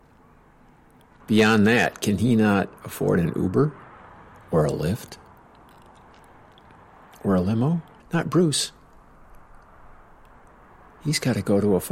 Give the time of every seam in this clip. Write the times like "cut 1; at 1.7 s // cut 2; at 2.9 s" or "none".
cut 1; at 1.2 s // cut 2; at 8.0 s